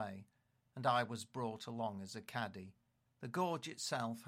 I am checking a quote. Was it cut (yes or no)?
yes